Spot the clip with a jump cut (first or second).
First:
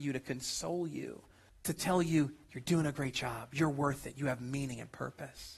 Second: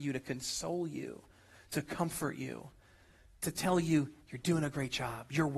first